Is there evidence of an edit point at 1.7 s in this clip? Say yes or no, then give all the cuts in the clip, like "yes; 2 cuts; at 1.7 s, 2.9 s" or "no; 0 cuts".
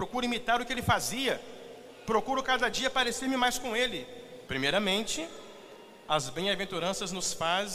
no; 1 cut; at 4.5 s